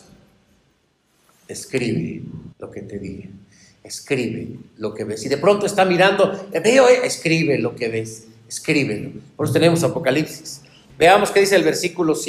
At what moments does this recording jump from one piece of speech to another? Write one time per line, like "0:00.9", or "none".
0:02.5
0:10.9

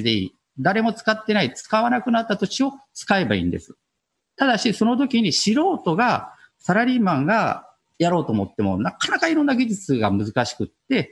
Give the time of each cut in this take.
none

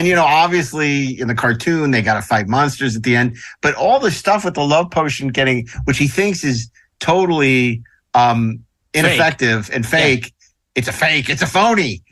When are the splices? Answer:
none

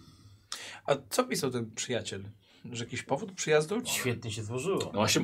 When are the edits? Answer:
0:03.8

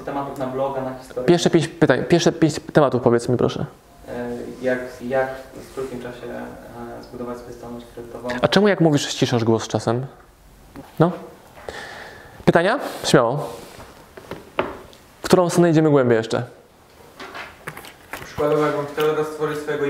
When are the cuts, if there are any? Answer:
0:05.0
0:10.8

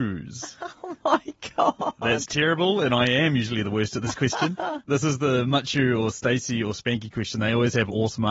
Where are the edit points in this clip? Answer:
none

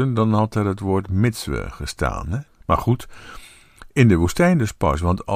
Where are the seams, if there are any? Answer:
0:02.5

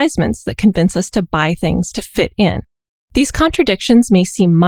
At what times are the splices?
0:03.0

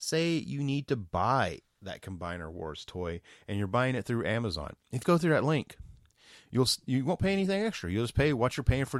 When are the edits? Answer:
0:05.0

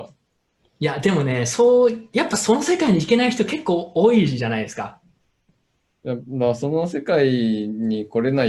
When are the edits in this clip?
none

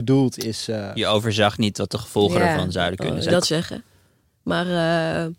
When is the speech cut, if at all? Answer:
0:03.3

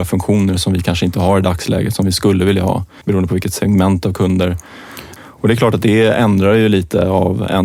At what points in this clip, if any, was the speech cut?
0:03.0
0:05.2

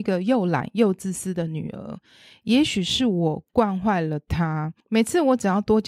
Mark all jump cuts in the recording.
0:04.8

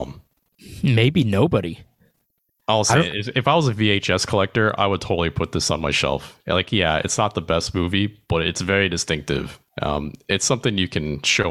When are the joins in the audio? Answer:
none

